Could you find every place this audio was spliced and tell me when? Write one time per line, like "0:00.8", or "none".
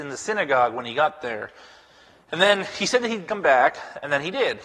none